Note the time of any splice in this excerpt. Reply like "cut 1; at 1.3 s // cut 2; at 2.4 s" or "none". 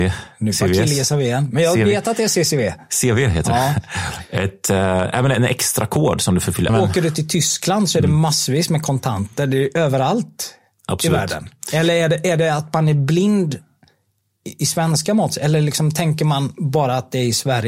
cut 1; at 6.7 s